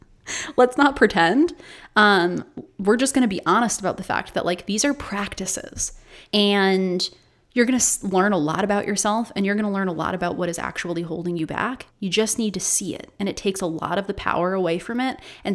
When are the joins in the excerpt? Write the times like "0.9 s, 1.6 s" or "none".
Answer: 6.2 s, 11.9 s